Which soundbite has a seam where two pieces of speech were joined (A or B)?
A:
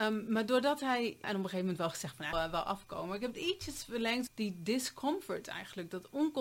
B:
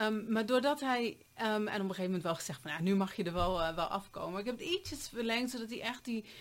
A